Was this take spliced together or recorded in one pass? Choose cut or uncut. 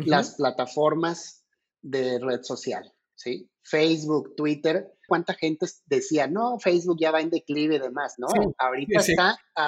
cut